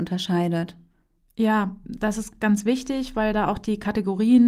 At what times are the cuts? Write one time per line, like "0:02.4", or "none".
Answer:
none